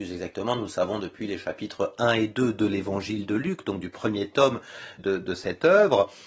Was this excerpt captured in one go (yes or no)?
no